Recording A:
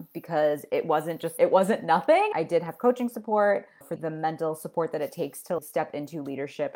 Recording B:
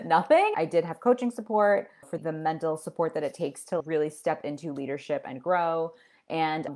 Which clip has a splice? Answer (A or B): A